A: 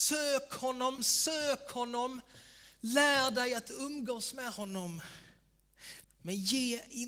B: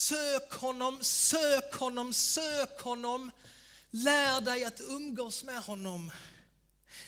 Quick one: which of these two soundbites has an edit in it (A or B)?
A